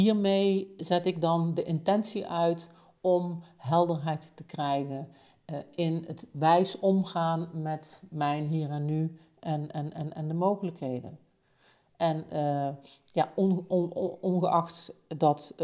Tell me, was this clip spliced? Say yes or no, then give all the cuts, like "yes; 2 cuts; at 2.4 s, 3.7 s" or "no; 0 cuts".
no; 0 cuts